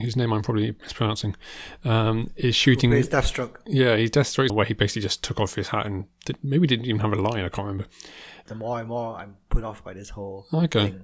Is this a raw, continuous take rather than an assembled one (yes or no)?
no